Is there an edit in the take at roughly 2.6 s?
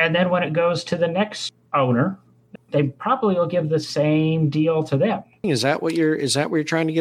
yes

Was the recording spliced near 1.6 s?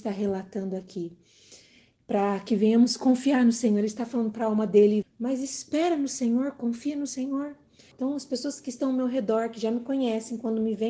no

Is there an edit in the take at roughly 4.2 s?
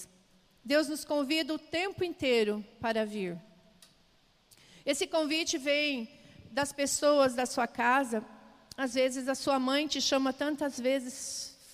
no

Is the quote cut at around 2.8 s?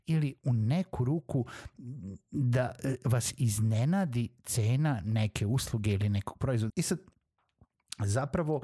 no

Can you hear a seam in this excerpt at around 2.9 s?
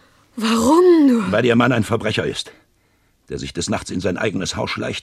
no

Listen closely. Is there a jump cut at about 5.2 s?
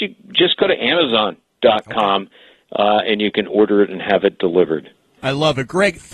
yes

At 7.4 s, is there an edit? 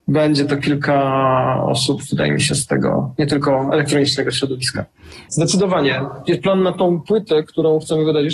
no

